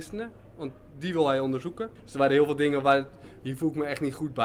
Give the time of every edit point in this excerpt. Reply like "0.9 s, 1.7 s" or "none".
2.0 s, 3.4 s